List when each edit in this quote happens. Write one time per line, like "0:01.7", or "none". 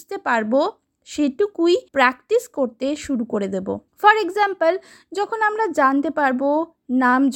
0:01.9
0:03.9